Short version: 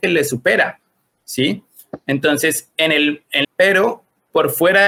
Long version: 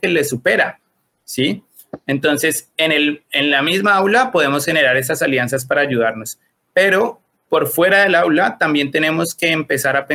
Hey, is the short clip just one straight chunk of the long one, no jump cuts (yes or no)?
no